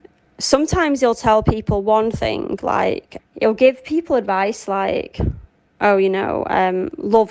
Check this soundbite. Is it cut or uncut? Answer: cut